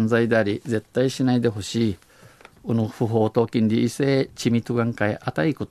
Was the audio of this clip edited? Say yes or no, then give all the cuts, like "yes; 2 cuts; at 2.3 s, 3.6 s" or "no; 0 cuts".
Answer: no; 0 cuts